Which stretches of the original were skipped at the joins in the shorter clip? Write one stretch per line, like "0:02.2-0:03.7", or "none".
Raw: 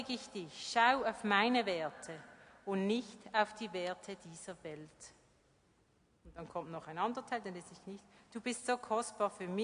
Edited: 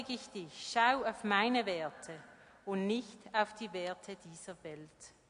none

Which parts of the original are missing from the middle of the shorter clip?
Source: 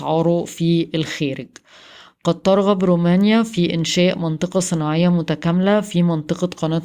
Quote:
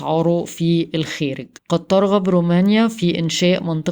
0:01.6-0:02.1

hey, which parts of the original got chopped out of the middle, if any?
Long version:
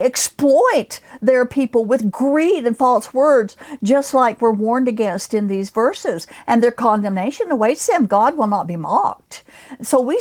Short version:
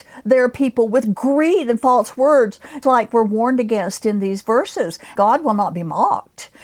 0:03.8-0:04.1
0:06.4-0:08.1

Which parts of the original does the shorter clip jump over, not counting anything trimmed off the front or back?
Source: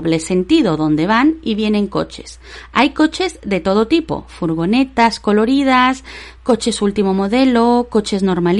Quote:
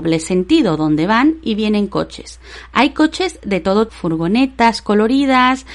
0:03.9-0:04.3

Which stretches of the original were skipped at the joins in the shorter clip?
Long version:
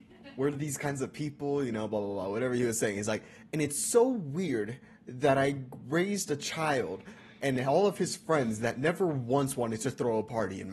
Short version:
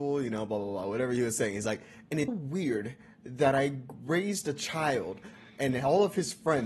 0:03.7-0:04.1

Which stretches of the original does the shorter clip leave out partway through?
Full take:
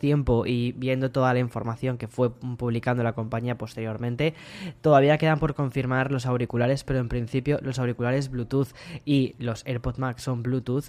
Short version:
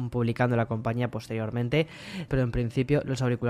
0:04.8-0:06.9

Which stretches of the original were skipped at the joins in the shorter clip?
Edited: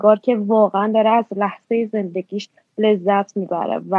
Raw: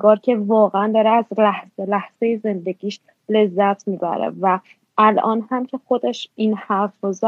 0:01.4-0:01.9

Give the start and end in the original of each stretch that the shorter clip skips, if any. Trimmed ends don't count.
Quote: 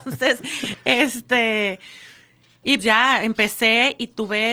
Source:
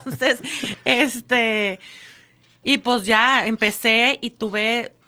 0:02.8-0:03.0

